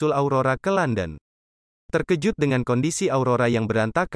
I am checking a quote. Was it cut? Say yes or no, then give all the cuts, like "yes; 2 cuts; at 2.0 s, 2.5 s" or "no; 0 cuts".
no; 0 cuts